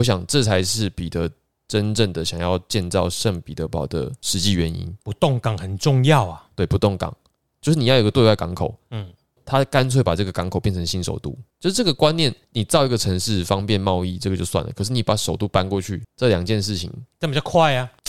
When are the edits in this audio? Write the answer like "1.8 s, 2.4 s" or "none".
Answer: none